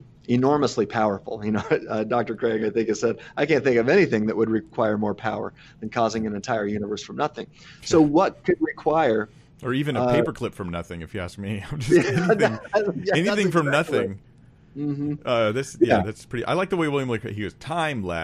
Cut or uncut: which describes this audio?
uncut